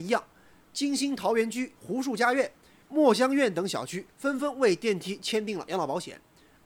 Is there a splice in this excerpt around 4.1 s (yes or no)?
no